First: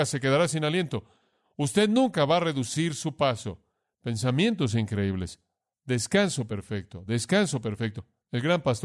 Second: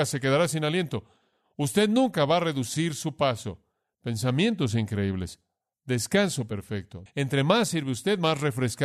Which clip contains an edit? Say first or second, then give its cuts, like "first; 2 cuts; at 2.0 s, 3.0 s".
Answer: second; 1 cut; at 7.1 s